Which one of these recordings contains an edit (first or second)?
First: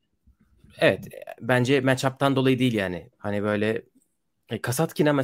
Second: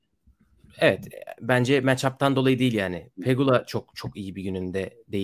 first